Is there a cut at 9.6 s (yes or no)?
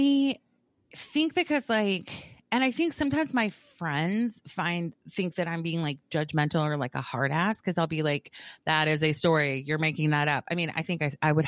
no